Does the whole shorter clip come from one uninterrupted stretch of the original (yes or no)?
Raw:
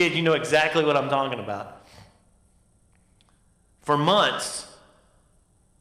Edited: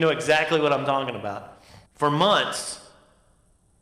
no